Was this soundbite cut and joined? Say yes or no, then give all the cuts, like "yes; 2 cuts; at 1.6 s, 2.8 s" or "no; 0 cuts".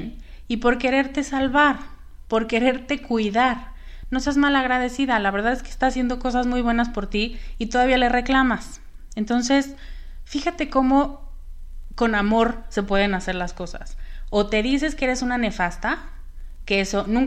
no; 0 cuts